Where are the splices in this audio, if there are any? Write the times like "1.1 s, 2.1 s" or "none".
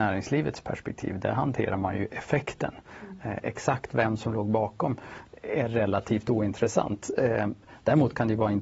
none